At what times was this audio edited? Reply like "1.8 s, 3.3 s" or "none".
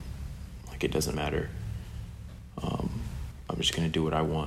1.1 s